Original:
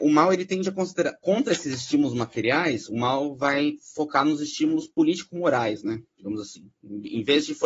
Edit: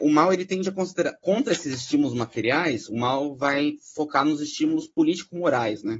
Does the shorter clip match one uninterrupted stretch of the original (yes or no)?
yes